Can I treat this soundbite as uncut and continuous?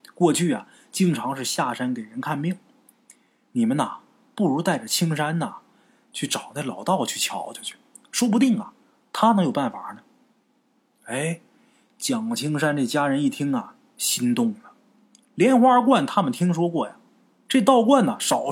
yes; 0 cuts

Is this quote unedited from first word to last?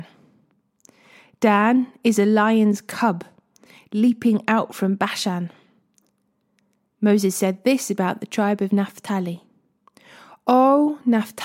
yes; 0 cuts

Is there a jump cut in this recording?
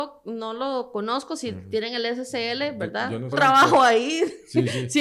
yes; 1 cut; at 3.3 s

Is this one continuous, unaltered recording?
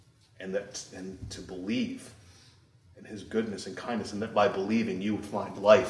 yes; 0 cuts

